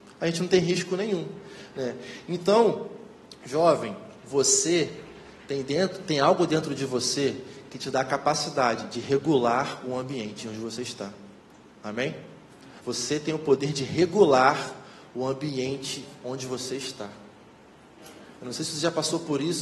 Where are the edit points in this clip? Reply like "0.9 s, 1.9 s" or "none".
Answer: 12.8 s